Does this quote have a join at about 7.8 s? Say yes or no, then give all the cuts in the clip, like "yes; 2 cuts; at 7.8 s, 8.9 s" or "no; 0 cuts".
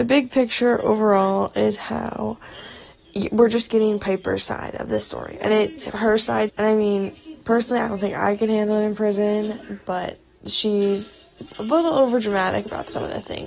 no; 1 cut; at 6.5 s